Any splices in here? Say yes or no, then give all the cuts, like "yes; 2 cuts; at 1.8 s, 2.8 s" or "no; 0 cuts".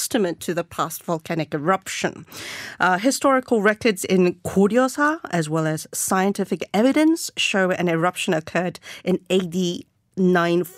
no; 0 cuts